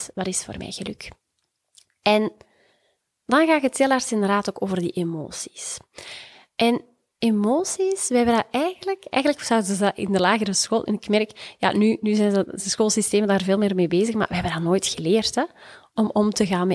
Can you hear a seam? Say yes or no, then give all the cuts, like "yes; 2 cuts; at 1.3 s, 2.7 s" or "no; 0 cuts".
no; 0 cuts